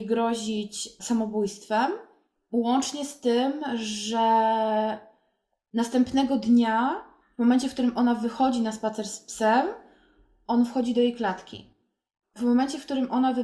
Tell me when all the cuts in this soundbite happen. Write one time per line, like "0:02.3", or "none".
0:12.2